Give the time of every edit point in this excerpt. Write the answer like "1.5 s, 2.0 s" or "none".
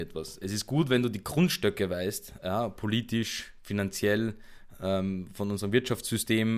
none